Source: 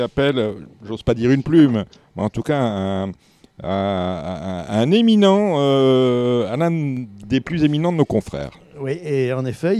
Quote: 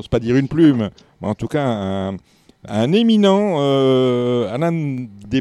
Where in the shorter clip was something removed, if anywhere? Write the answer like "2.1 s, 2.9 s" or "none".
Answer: 2.7 s